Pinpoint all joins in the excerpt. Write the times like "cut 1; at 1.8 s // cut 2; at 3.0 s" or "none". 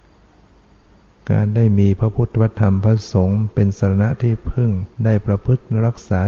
cut 1; at 4.9 s